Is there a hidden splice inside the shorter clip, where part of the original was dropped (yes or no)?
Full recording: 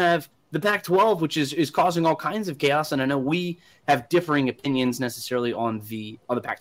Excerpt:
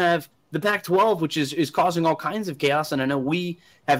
no